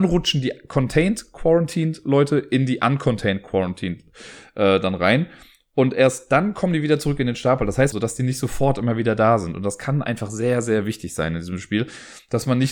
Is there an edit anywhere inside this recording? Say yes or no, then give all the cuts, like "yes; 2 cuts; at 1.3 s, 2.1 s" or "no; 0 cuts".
yes; 1 cut; at 7.9 s